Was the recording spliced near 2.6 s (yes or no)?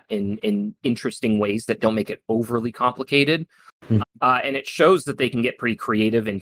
no